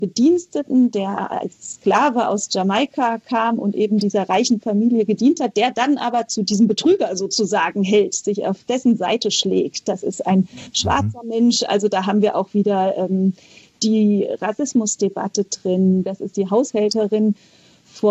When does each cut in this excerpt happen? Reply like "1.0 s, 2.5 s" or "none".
16.1 s